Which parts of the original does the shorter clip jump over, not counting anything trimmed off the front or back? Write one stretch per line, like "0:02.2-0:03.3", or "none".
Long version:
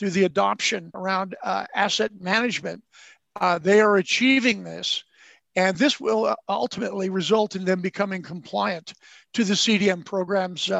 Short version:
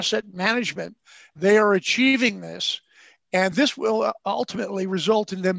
0:03.2-0:03.6